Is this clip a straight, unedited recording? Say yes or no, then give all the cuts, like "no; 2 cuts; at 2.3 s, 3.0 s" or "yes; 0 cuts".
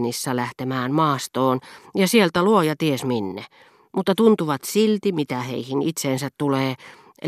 yes; 0 cuts